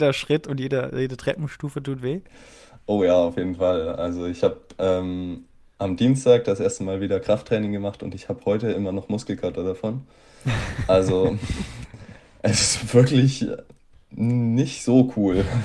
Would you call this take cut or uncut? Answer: uncut